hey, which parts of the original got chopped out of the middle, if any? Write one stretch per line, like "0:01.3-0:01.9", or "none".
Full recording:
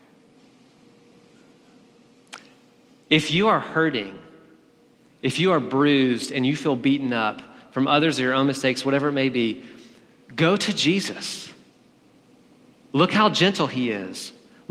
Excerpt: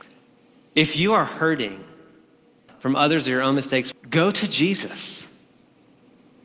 0:05.0-0:07.6
0:08.8-0:10.2